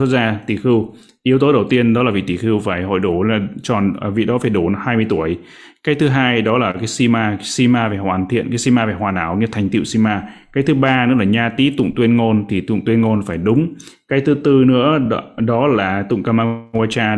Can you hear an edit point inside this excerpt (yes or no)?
no